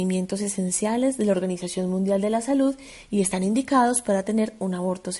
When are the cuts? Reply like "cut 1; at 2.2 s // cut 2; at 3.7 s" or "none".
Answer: none